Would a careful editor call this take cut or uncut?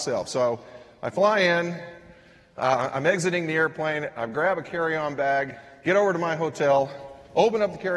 uncut